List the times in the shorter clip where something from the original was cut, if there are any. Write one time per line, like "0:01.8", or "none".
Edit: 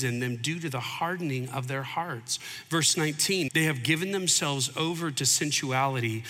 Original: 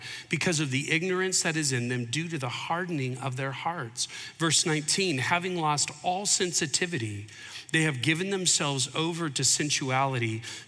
0:03.5